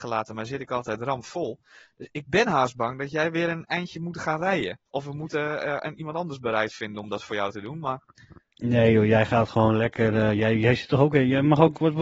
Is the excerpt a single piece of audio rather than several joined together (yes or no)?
yes